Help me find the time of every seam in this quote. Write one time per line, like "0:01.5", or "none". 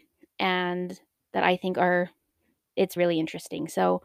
0:03.0